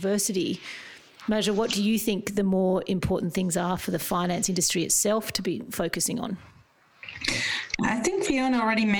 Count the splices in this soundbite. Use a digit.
0